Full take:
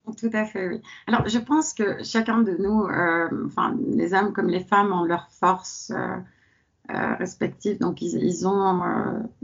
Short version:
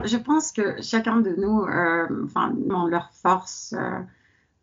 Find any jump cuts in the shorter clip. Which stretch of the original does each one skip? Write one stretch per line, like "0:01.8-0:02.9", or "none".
0:03.9-0:04.9

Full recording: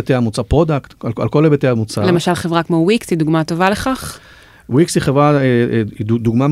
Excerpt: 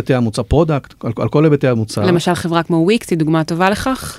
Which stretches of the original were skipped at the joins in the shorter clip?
none

